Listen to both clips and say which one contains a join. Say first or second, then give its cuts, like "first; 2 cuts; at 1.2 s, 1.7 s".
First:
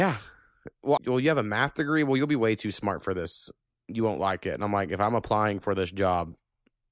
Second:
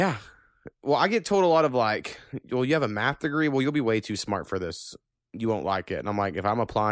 first; 1 cut; at 1.0 s